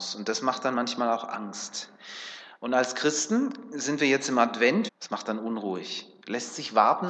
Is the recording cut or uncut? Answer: cut